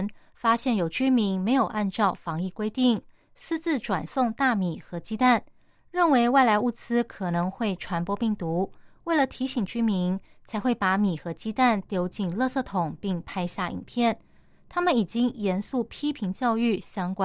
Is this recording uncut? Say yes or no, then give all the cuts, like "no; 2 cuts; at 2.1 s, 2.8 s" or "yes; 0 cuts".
yes; 0 cuts